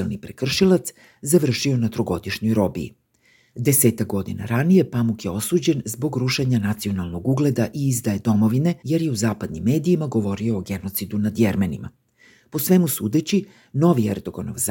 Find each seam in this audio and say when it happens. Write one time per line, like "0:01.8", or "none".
0:03.5
0:08.8